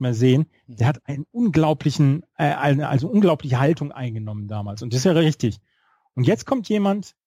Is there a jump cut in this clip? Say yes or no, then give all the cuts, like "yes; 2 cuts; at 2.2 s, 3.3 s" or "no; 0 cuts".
no; 0 cuts